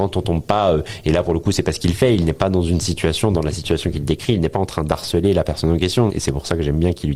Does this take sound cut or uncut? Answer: cut